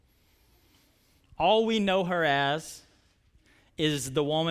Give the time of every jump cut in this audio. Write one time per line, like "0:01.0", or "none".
none